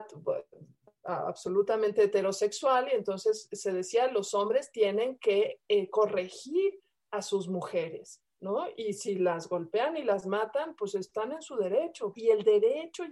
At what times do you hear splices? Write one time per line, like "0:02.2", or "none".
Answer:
0:12.1